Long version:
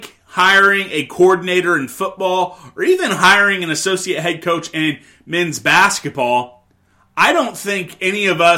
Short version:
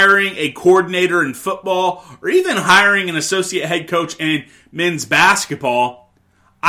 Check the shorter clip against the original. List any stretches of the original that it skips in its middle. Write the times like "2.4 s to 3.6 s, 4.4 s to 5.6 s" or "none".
none